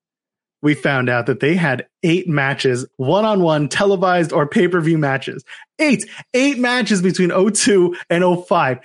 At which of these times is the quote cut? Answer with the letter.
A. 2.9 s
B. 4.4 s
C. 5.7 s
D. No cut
A